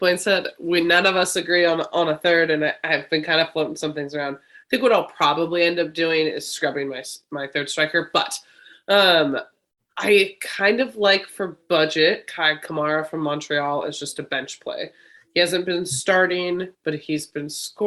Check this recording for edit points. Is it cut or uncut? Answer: uncut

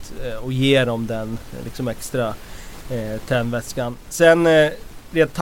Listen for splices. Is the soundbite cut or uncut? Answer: uncut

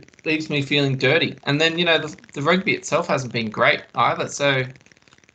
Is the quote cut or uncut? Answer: cut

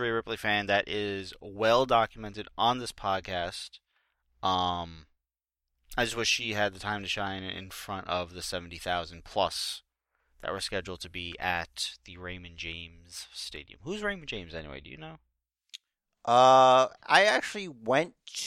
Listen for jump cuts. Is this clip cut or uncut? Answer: uncut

